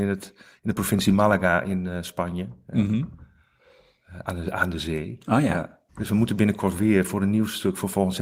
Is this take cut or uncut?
cut